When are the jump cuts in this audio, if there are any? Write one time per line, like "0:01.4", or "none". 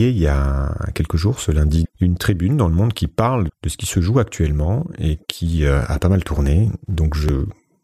0:01.8
0:03.5